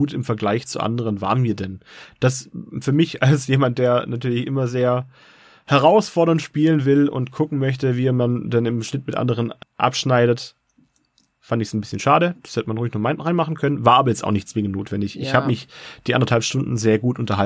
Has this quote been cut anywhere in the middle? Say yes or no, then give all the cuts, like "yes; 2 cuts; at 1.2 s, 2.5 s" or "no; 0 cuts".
no; 0 cuts